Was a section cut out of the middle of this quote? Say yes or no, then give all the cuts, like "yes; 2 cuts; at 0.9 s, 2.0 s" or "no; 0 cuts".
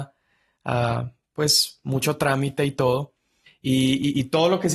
yes; 1 cut; at 3.5 s